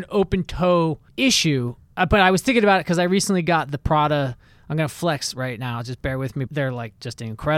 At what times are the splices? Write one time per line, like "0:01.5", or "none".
0:01.1
0:06.5